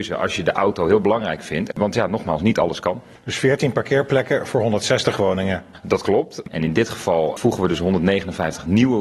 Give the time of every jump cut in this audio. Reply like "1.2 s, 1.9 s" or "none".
1.7 s, 6.4 s